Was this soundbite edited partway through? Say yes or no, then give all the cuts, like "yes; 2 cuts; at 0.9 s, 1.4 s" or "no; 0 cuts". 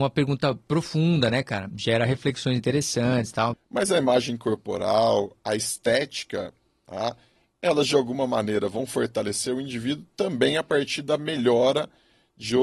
yes; 1 cut; at 3.5 s